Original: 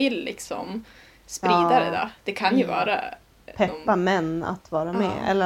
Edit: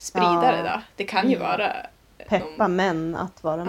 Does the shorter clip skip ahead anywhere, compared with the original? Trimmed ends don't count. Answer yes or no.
no